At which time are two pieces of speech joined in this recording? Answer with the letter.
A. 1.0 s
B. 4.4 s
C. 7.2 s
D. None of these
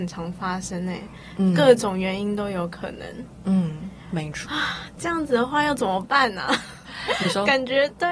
B